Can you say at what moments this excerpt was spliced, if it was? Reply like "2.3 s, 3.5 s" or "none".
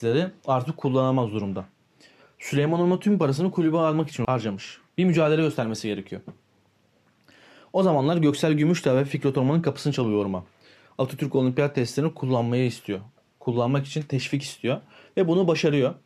none